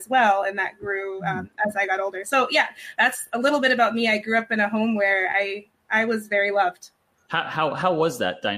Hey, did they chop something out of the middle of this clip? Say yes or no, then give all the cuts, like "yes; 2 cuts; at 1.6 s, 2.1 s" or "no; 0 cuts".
no; 0 cuts